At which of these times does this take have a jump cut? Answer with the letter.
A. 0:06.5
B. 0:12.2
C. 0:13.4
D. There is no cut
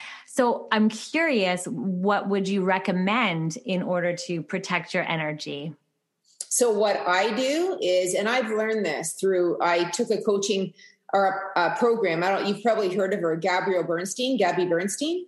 D